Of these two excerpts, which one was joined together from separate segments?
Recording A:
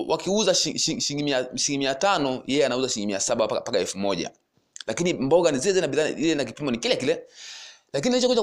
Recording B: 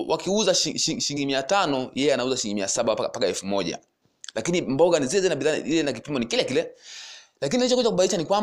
B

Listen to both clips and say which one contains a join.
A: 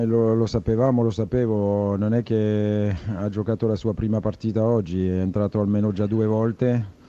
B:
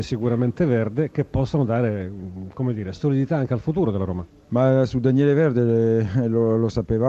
B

